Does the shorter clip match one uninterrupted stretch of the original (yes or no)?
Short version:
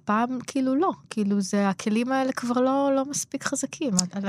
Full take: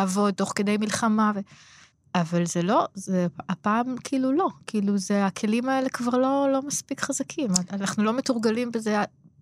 yes